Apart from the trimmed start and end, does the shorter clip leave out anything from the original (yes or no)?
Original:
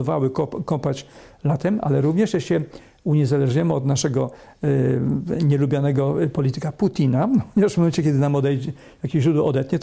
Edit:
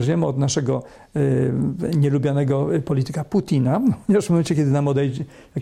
no